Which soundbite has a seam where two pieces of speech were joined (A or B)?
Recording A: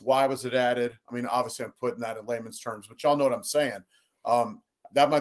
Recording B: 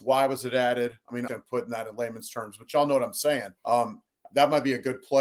B